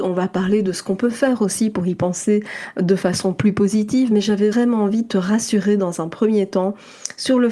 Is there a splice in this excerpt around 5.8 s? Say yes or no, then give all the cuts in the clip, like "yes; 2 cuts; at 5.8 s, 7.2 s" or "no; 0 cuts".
no; 1 cut; at 4.5 s